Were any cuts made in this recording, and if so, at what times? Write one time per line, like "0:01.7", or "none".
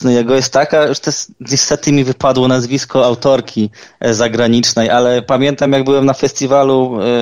none